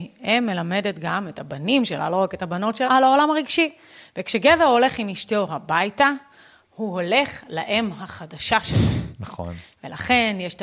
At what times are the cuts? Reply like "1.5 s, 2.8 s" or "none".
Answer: 2.9 s